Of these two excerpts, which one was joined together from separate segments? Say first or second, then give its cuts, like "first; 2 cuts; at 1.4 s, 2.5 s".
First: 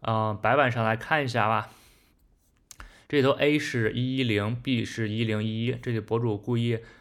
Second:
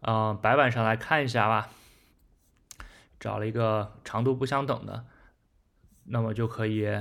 second; 1 cut; at 3.1 s